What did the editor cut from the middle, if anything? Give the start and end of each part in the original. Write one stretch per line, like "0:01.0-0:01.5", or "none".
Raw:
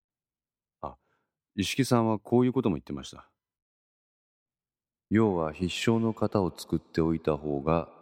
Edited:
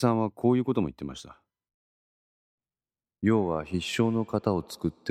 none